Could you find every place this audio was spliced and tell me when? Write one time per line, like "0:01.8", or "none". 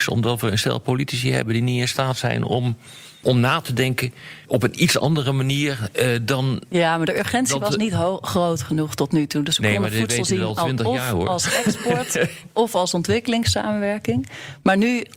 none